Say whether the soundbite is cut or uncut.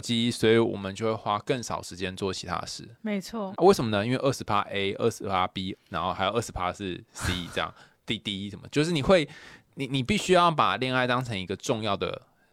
cut